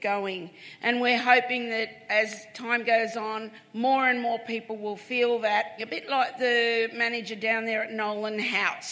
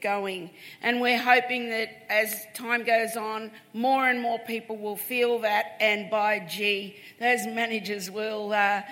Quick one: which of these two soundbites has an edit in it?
first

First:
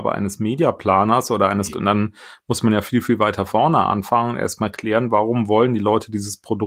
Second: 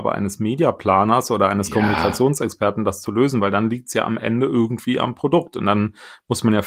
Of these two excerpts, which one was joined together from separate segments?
first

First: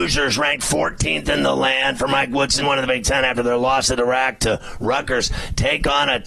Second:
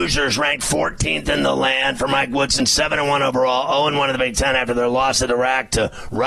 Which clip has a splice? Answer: first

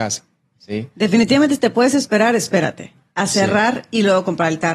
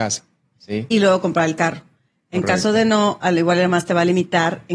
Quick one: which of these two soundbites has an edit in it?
second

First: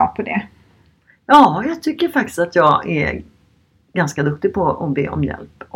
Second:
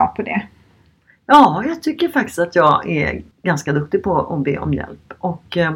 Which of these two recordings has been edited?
second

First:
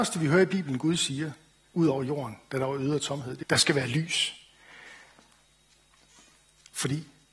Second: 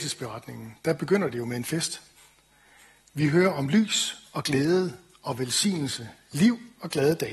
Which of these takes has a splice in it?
first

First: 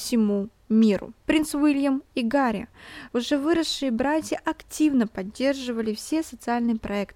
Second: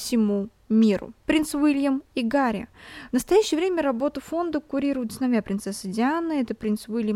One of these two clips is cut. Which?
first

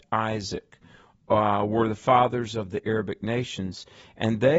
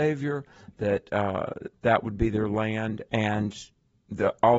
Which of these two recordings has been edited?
second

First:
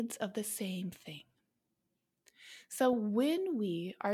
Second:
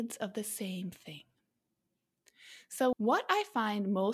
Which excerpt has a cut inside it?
second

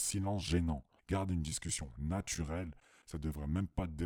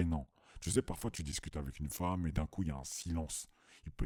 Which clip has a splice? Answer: first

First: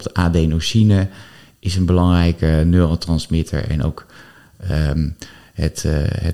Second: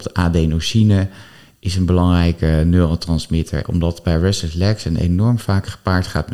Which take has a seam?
second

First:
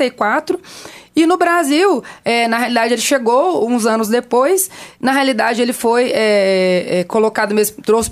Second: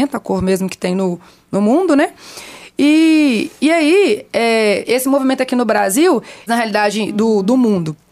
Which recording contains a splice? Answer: second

